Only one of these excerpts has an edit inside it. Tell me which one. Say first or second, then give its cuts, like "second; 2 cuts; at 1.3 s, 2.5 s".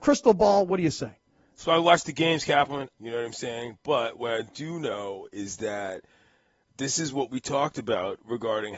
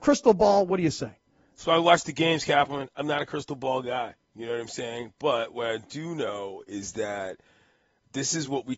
first; 1 cut; at 2.9 s